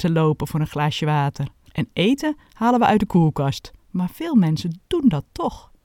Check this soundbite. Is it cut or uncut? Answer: cut